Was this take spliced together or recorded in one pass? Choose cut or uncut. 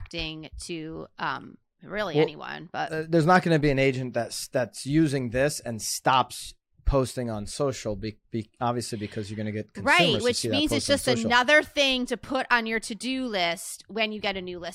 uncut